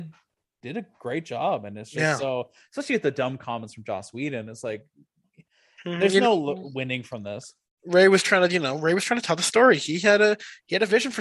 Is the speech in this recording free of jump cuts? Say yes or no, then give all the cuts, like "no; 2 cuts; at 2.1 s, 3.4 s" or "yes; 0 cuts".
yes; 0 cuts